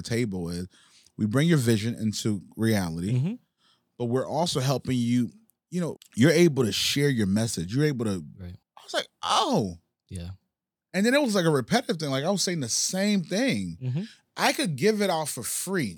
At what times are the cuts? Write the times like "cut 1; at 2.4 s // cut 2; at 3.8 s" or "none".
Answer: cut 1; at 6.0 s // cut 2; at 8.6 s